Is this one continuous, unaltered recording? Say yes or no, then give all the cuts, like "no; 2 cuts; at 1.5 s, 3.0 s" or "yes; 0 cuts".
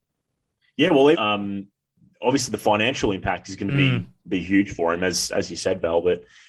no; 1 cut; at 1.1 s